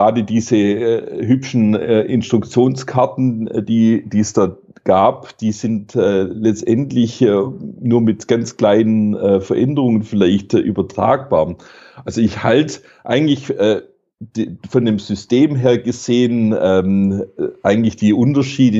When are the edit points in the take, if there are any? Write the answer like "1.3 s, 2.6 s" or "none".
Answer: none